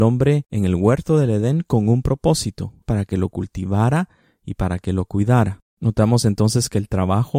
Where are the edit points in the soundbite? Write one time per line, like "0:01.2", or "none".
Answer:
0:02.8

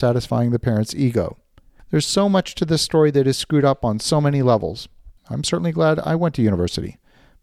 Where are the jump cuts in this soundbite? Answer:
0:05.2

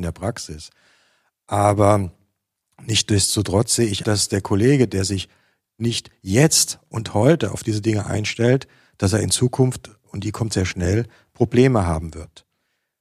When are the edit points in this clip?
0:04.0

